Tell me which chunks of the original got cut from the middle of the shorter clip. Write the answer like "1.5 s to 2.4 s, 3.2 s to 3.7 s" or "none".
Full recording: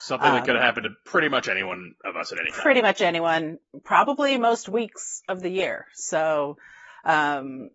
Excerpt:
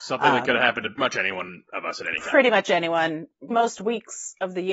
1.0 s to 1.3 s, 3.8 s to 4.4 s